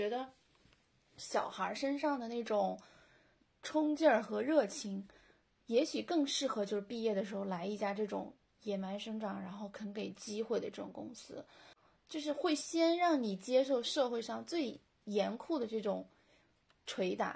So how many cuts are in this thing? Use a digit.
0